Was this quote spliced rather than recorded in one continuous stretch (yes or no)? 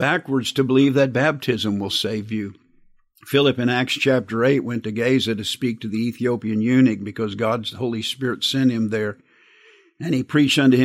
no